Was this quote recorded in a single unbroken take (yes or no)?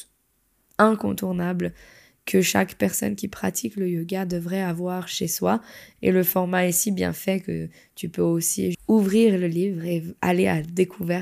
no